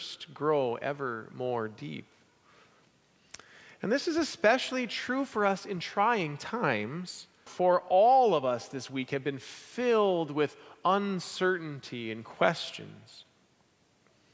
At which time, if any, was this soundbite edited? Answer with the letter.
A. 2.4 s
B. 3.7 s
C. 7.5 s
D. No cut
C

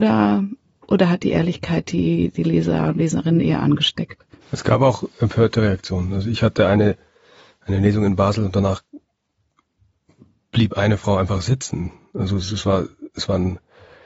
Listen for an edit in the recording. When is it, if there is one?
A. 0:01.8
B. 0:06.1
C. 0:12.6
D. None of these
D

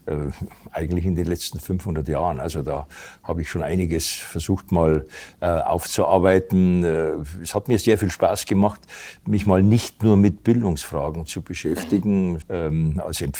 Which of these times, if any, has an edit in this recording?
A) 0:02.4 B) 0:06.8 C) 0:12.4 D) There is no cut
C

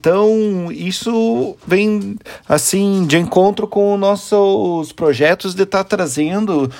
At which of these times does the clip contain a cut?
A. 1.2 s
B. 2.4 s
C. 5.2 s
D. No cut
D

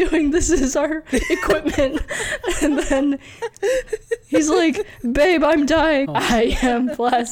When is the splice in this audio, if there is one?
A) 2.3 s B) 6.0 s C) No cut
B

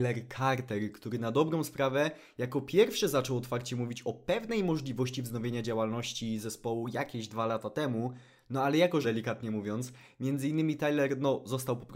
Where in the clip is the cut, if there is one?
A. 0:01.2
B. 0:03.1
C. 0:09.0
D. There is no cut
C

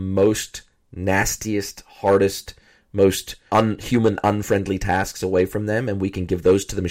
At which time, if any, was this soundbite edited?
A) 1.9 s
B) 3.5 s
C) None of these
B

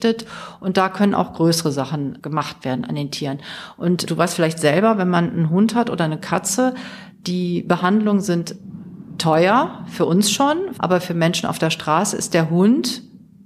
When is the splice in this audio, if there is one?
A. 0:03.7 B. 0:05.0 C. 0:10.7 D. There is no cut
C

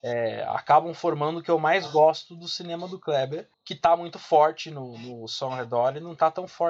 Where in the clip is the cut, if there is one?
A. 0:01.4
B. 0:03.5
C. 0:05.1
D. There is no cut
B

